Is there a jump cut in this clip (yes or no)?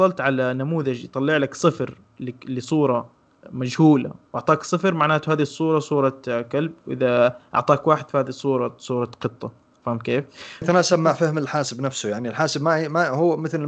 yes